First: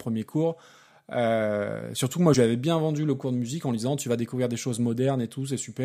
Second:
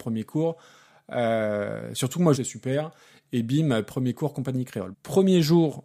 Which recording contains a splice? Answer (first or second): second